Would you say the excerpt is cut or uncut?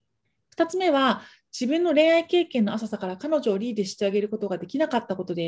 uncut